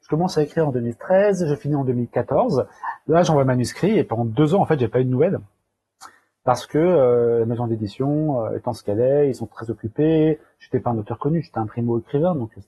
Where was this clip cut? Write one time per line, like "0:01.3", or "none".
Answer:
none